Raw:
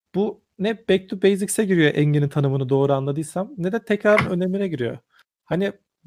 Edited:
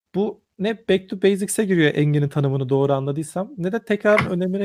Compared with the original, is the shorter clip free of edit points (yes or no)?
yes